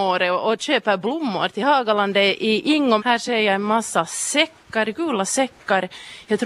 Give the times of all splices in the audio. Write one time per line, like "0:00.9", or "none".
0:03.0